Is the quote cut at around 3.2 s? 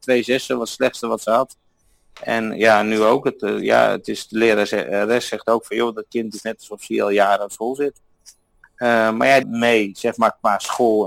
no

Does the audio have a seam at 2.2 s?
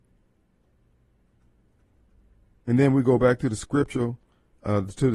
no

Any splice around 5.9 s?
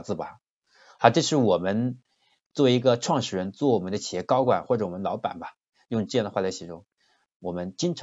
no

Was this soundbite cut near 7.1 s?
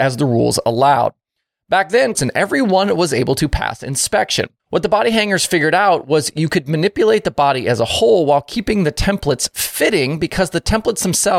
no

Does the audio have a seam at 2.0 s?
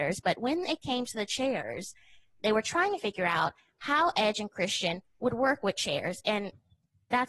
no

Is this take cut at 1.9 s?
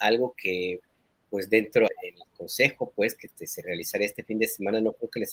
yes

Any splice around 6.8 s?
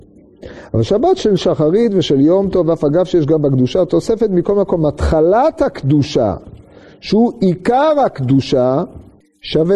no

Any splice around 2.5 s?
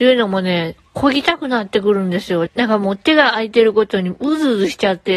yes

